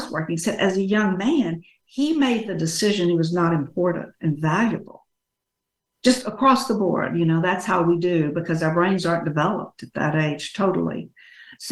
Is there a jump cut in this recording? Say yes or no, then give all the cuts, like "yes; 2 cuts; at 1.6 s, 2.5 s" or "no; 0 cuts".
no; 0 cuts